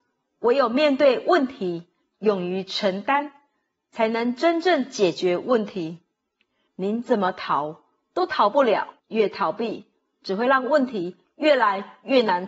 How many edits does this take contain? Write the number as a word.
two